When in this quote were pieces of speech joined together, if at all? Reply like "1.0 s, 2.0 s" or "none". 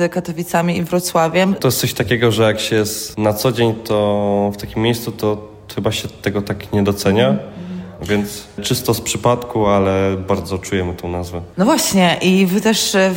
1.6 s, 8.0 s